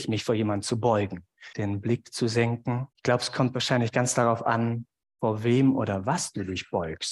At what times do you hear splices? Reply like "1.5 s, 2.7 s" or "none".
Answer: 1.5 s, 2.9 s